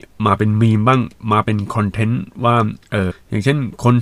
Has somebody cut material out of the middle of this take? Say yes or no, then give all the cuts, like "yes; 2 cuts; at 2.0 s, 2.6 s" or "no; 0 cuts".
yes; 1 cut; at 3.1 s